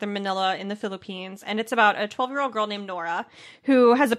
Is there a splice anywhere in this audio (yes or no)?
no